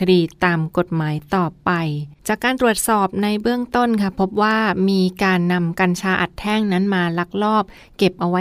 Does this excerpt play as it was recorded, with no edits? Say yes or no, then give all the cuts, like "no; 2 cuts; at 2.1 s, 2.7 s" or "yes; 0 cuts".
no; 1 cut; at 2.2 s